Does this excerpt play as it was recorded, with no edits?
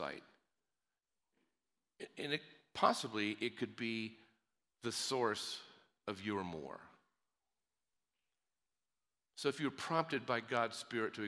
yes; 0 cuts

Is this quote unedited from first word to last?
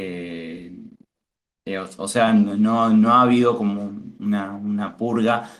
yes; 0 cuts

